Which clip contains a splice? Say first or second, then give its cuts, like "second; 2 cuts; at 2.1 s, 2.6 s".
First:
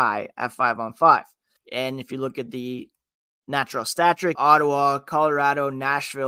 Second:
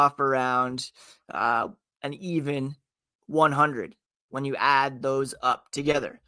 first; 2 cuts; at 1.6 s, 4.4 s